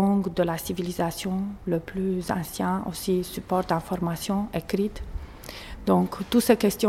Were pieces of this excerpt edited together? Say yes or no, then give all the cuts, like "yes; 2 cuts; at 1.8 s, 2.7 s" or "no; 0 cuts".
no; 0 cuts